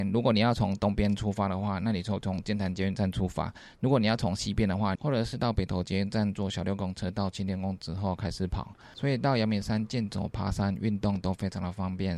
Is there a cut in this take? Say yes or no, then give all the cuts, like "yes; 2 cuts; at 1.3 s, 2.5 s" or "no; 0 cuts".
yes; 1 cut; at 5.0 s